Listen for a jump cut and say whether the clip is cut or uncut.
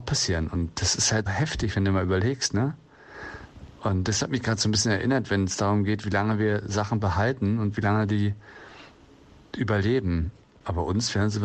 cut